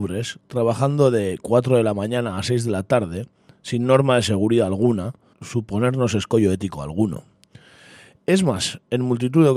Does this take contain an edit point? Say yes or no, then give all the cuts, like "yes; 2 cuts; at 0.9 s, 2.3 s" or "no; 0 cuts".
yes; 1 cut; at 5.3 s